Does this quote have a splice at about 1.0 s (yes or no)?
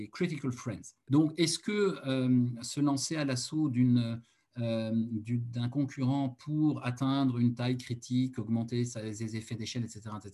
yes